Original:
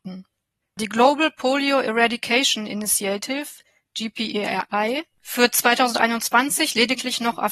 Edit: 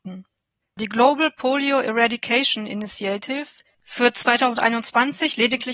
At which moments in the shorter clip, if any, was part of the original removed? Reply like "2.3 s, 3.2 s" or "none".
3.7 s